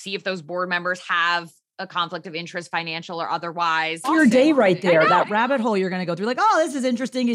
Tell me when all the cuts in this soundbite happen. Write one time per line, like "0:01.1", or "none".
0:04.0